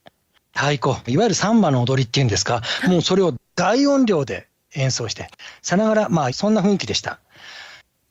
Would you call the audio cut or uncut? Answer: cut